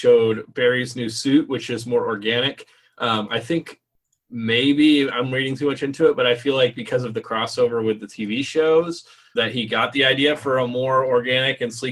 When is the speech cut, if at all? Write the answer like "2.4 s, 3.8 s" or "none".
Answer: 9.4 s